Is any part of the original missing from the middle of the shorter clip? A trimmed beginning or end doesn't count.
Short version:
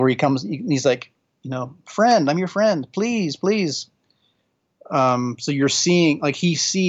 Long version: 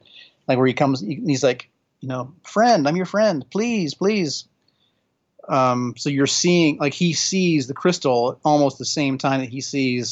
no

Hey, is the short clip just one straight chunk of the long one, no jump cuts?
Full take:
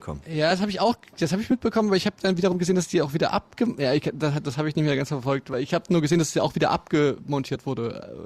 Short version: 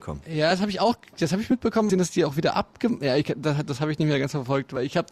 no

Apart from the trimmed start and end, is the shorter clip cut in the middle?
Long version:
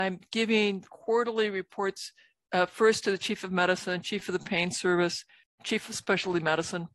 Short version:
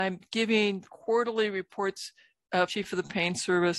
yes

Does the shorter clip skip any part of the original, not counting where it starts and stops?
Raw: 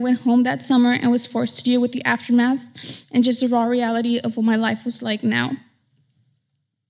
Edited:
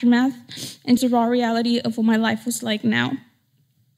yes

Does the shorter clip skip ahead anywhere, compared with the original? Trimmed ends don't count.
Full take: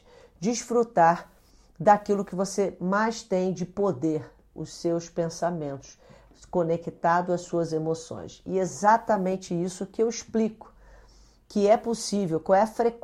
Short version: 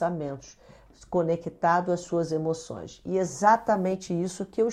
no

